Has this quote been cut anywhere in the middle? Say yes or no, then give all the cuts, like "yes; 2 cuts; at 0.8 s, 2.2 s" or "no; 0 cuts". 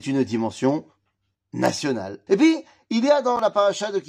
yes; 1 cut; at 2.3 s